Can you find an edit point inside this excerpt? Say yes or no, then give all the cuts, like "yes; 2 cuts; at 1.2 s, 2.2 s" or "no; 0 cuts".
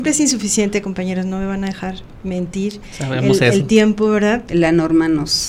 yes; 1 cut; at 4.5 s